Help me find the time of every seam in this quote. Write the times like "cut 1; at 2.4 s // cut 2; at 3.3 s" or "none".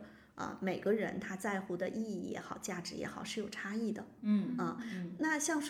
none